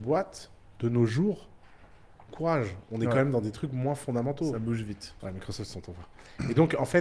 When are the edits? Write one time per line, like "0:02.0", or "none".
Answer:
0:02.3
0:05.2

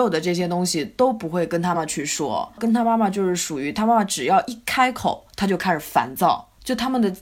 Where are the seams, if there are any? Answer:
0:01.7

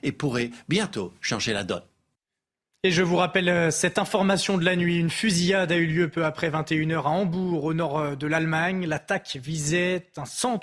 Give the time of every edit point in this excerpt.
none

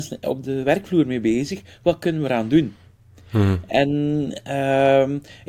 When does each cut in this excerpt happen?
none

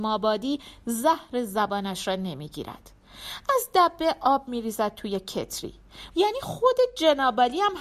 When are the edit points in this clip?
0:06.1

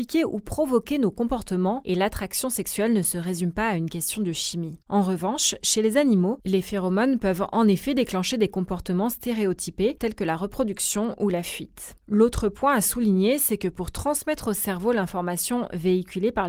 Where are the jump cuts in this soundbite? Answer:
0:04.8

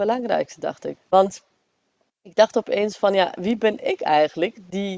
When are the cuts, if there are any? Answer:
0:01.0

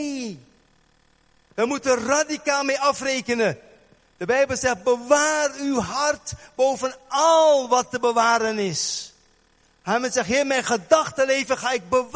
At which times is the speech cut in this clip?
none

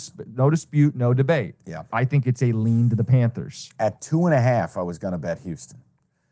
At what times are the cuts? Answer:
0:01.9

